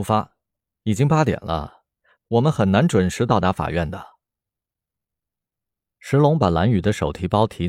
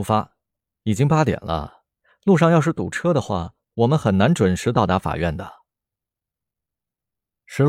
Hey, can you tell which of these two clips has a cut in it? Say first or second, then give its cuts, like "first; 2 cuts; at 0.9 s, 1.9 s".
first; 1 cut; at 2.2 s